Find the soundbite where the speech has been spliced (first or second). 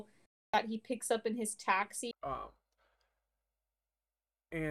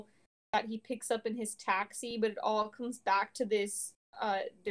first